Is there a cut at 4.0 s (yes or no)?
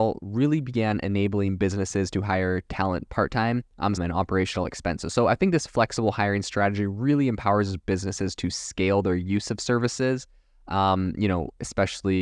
yes